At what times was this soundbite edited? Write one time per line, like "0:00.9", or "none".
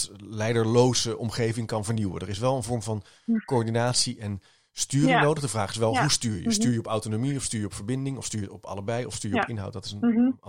none